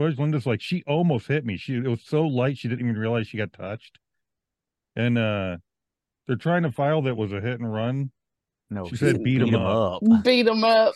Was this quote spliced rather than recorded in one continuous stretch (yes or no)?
yes